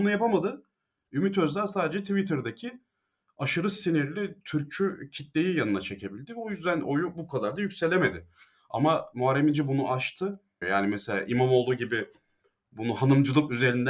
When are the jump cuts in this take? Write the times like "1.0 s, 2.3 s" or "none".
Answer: 10.6 s